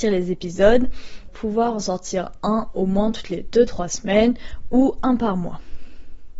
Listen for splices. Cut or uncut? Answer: cut